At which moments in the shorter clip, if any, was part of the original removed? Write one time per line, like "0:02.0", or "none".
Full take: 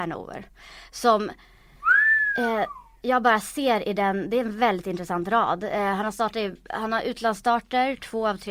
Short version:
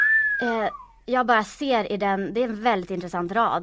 none